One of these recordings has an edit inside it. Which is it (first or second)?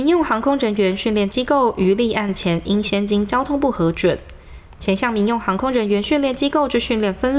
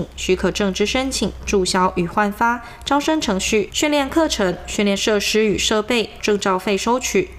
second